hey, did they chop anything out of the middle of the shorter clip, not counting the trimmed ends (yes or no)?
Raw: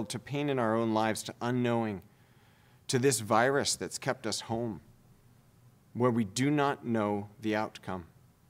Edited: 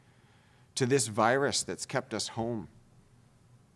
no